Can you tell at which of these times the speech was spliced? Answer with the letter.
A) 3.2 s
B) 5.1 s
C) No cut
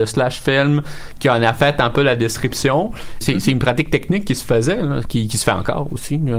A